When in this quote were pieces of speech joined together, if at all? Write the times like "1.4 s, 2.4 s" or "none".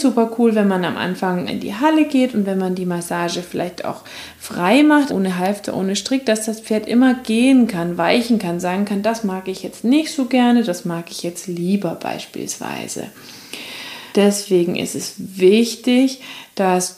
1.5 s, 5.1 s, 14.1 s